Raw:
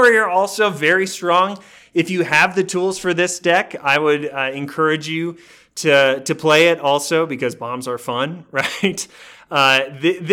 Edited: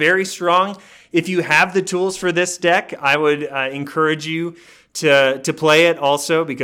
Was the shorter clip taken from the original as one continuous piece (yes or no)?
yes